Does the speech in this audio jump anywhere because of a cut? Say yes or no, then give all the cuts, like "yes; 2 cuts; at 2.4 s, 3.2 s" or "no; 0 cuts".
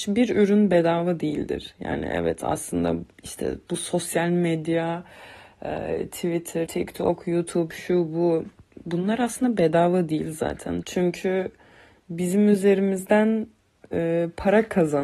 yes; 2 cuts; at 6.7 s, 10.8 s